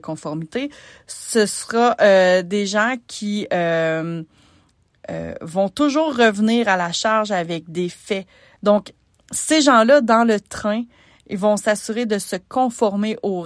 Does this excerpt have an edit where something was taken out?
yes; 1 cut; at 8.6 s

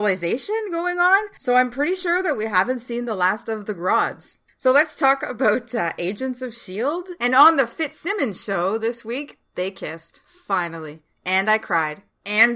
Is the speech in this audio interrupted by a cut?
no; 0 cuts

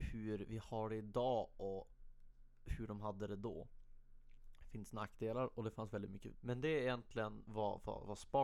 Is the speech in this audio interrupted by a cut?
yes; 1 cut; at 6.3 s

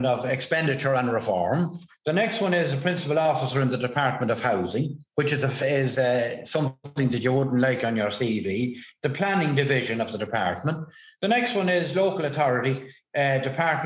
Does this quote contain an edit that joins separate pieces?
yes; 1 cut; at 5.6 s

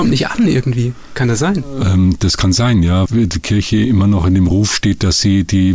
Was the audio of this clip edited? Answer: yes; 1 cut; at 3.1 s

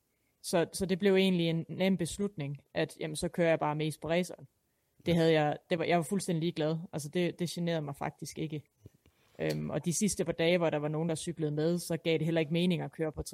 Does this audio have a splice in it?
no; 0 cuts

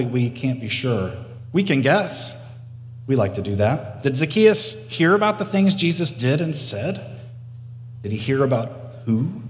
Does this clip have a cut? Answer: no; 0 cuts

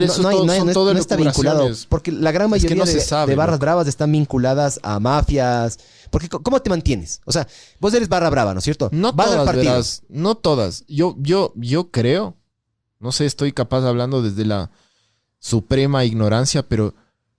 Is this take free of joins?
yes; 0 cuts

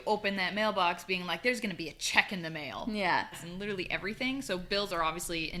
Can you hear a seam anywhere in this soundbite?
yes; 1 cut; at 3.3 s

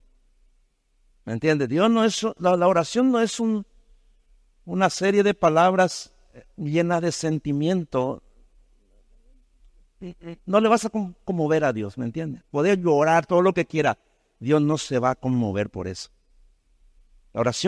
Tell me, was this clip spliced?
no; 0 cuts

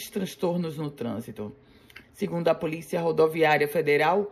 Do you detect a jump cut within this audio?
yes; 1 cut; at 2.0 s

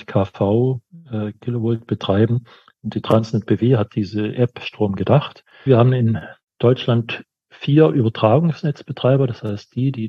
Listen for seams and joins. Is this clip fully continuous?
no; 2 cuts; at 2.8 s, 5.7 s

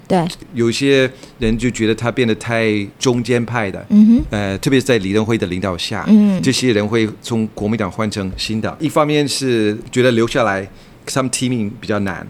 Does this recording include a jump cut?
yes; 1 cut; at 6.4 s

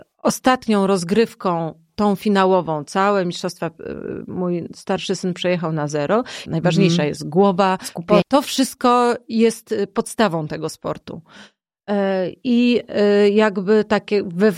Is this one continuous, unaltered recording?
no; 2 cuts; at 6.5 s, 8.2 s

